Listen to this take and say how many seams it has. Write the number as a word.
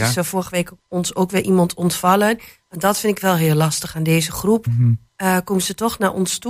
one